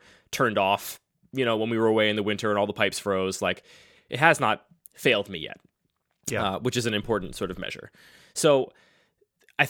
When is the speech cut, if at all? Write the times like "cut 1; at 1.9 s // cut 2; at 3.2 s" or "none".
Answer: none